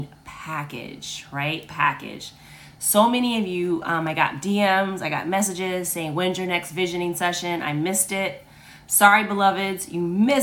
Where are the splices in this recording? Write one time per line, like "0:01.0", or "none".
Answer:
none